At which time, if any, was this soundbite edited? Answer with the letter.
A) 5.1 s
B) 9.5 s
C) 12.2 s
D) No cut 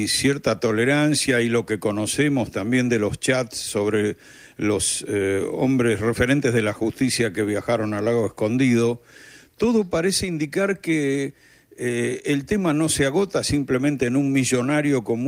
D